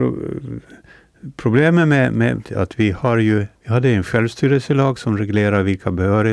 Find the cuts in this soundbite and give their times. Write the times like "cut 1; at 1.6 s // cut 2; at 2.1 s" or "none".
cut 1; at 2.4 s // cut 2; at 3.6 s